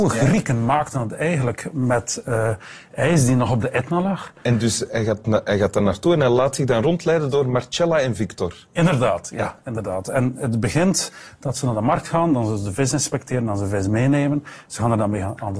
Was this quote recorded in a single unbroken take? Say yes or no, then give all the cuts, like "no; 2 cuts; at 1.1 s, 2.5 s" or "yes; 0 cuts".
no; 1 cut; at 4.4 s